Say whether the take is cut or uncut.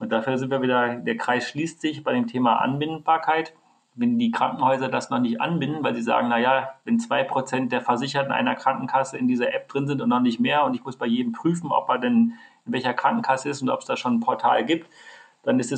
uncut